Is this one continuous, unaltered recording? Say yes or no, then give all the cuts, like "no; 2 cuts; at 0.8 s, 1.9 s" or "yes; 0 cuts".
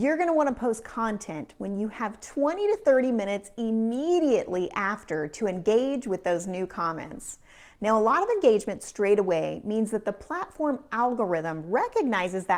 yes; 0 cuts